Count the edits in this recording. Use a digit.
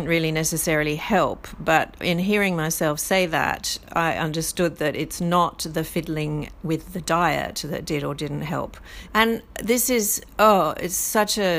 1